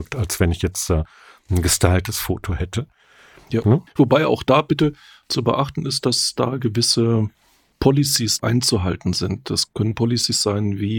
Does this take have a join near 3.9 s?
yes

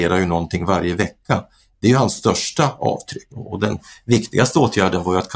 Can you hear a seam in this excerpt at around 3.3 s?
yes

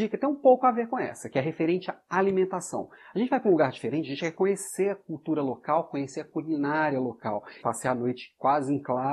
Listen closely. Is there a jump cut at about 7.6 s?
yes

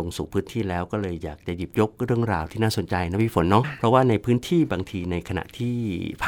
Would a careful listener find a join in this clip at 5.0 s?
no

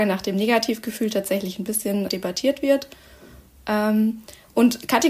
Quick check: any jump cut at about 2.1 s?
yes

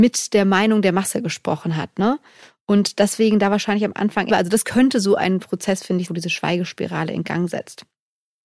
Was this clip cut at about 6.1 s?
yes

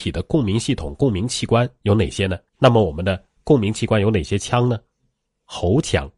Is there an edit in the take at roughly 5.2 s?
no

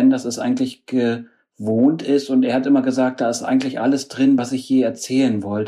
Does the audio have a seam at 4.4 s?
no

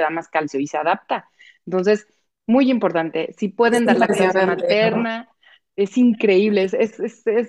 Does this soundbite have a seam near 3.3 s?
no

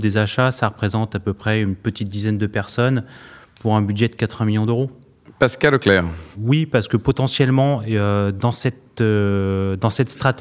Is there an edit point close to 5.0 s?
no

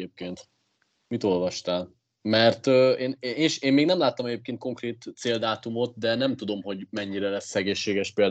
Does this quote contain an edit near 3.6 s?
no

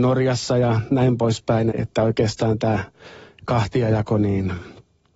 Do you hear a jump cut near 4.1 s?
no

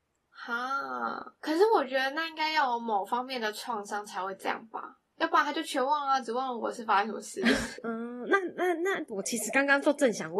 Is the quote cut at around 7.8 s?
yes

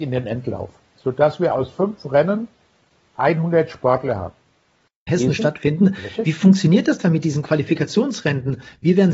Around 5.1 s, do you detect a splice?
yes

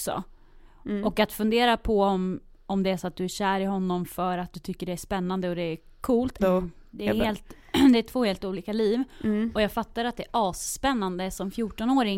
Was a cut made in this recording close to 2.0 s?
no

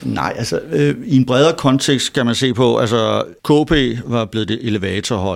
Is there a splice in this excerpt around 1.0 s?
no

